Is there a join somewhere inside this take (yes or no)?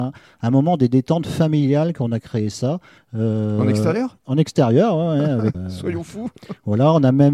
yes